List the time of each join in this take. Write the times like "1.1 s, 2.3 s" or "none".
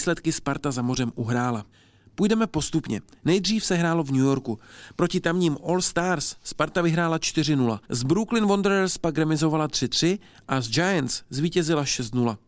7.8 s